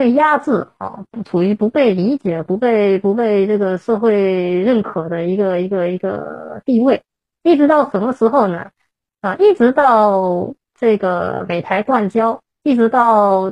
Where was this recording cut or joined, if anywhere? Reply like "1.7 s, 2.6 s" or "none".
12.5 s

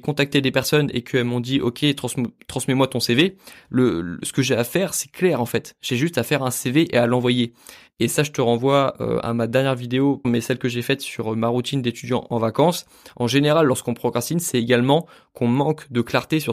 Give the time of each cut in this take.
7.9 s, 10.2 s

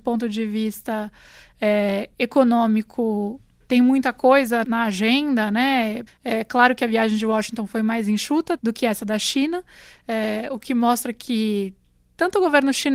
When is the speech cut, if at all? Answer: 4.6 s, 6.1 s, 8.6 s

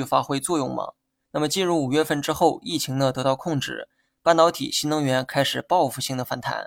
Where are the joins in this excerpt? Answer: 1.2 s, 4.1 s

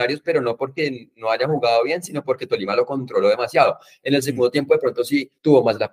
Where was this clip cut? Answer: none

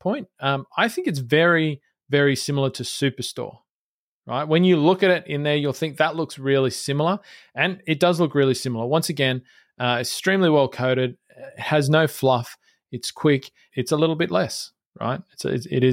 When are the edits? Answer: 13.7 s

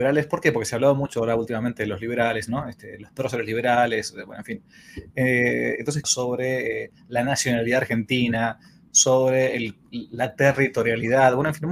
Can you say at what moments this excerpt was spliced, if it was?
6.0 s

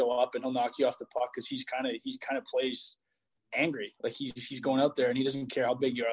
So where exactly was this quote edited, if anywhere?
none

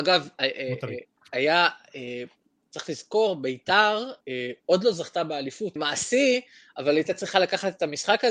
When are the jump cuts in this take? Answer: 4.2 s, 5.8 s

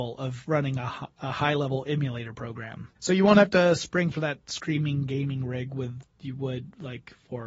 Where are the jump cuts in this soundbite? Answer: 3.0 s, 6.0 s

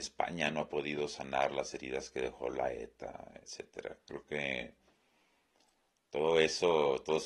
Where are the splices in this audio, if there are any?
3.4 s

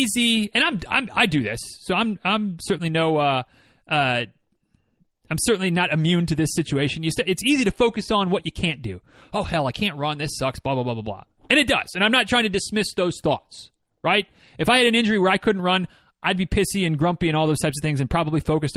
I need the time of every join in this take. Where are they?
none

